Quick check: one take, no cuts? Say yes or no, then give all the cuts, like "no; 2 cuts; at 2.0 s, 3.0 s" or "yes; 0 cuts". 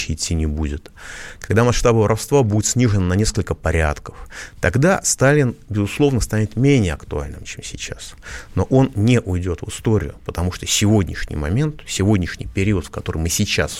yes; 0 cuts